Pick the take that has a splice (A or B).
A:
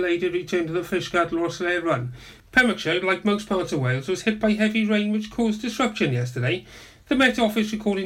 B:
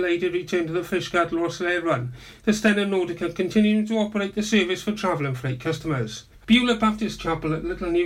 A